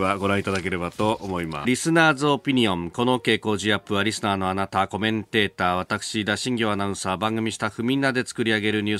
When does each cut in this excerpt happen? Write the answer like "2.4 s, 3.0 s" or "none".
1.6 s